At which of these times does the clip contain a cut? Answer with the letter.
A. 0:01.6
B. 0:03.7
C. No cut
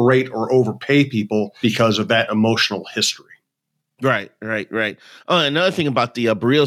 A